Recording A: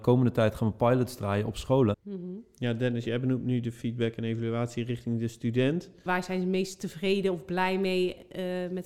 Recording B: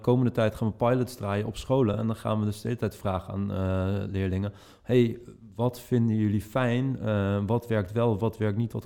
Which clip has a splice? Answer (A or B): A